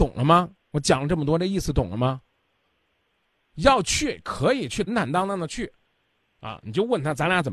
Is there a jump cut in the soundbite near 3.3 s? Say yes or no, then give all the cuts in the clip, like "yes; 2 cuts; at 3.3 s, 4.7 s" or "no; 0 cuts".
no; 1 cut; at 4.9 s